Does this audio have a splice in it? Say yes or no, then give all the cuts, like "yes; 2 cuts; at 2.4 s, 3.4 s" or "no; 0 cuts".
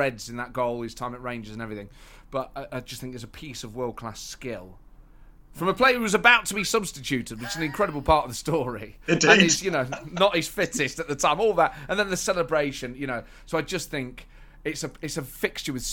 no; 0 cuts